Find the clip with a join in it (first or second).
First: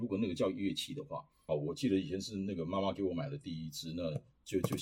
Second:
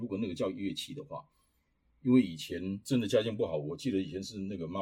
first